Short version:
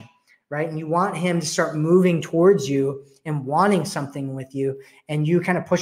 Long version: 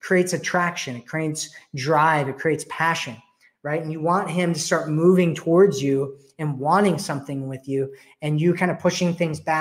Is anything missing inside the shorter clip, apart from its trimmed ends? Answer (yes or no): no